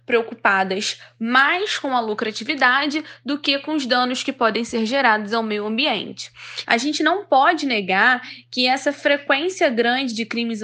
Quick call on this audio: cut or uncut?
cut